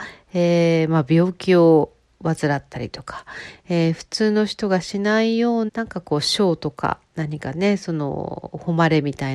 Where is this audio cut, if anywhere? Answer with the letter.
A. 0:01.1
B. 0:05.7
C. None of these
B